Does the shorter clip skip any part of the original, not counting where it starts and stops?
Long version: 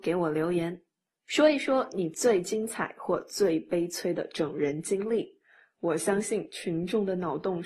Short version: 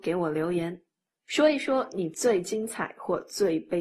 no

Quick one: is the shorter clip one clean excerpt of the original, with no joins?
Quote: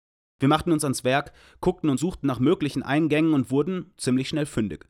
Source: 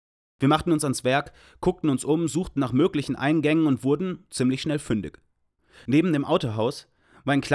no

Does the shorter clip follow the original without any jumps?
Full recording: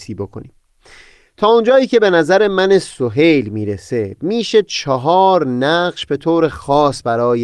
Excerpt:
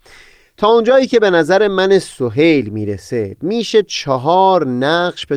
yes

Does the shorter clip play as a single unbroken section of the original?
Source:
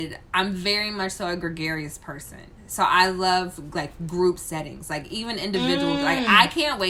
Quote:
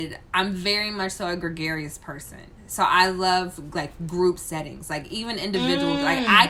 yes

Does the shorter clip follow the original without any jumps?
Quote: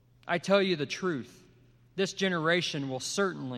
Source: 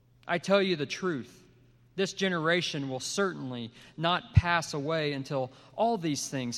yes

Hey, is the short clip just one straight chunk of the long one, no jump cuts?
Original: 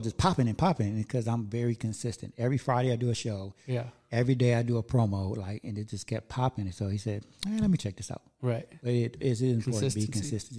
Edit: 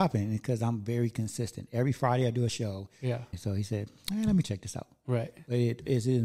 no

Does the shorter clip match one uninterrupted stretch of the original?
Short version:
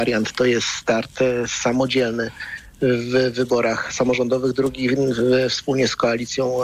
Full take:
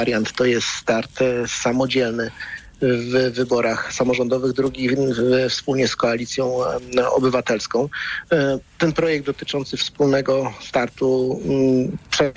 yes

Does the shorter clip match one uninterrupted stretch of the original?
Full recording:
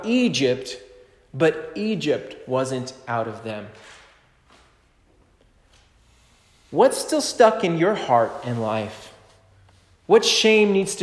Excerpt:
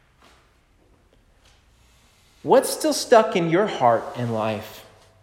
yes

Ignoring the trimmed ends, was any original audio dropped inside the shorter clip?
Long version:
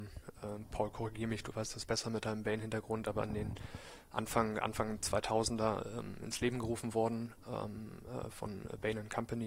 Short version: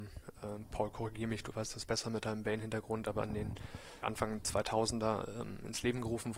yes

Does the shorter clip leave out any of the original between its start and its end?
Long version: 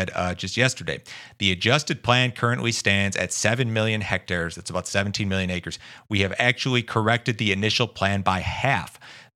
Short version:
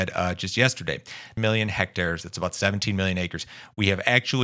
yes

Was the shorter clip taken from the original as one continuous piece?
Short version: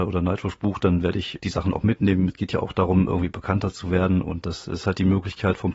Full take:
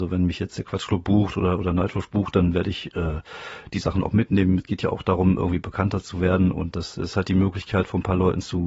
no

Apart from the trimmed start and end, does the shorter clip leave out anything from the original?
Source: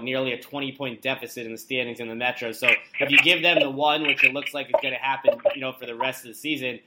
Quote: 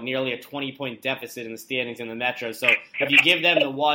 no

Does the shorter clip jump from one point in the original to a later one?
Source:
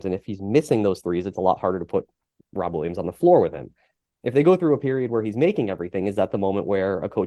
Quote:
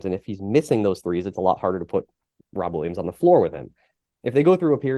no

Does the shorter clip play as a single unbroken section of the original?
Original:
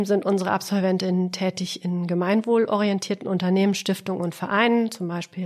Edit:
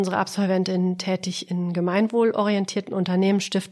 yes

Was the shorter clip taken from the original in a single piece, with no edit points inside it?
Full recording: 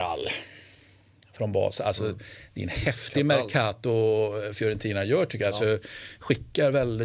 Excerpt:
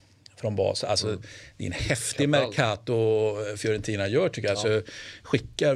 yes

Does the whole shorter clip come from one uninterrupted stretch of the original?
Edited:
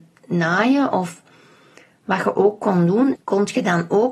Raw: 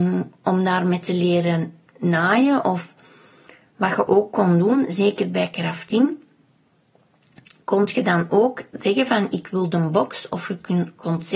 no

